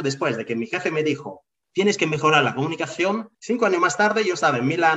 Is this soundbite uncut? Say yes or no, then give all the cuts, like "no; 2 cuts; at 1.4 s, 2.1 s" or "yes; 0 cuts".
no; 2 cuts; at 1.6 s, 3.3 s